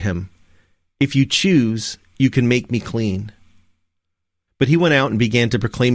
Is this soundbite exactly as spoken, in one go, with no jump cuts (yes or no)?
no